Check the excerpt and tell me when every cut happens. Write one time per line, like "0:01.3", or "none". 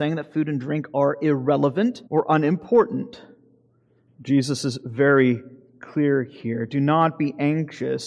0:02.1
0:04.1